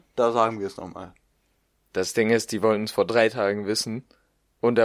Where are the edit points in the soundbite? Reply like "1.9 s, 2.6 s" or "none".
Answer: none